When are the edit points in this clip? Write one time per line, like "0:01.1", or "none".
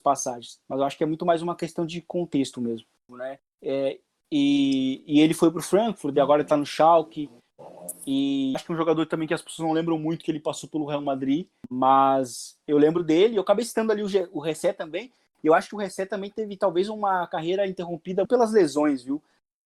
0:03.1
0:18.3